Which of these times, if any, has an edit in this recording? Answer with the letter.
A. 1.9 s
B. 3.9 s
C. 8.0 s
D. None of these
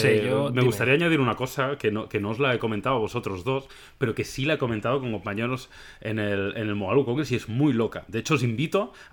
D